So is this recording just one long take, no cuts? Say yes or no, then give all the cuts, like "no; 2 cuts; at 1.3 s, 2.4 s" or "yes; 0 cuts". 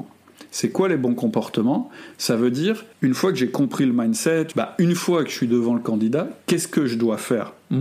no; 2 cuts; at 2.9 s, 4.5 s